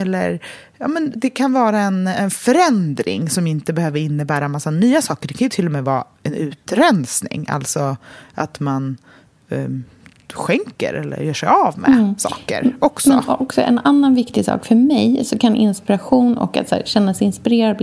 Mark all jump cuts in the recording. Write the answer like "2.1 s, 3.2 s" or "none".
1.1 s